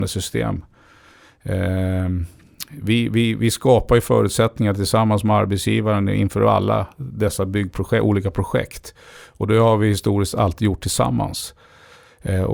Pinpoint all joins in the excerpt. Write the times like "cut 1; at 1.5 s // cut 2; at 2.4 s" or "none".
none